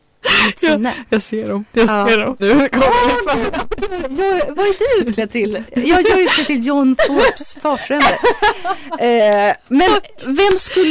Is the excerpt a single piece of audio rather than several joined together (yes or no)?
no